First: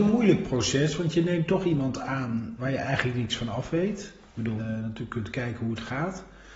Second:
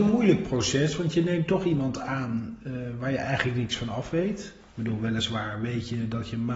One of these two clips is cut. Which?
first; 2 cuts; at 2.6 s, 4.6 s

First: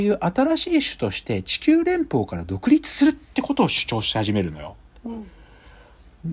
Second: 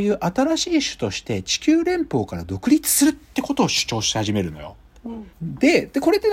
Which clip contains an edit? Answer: second; 1 cut; at 5.3 s

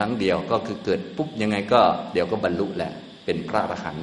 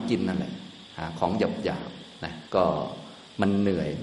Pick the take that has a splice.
second; 1 cut; at 2.5 s

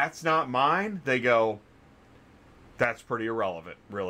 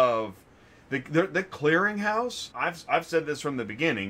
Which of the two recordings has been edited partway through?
second; 1 cut; at 2.5 s

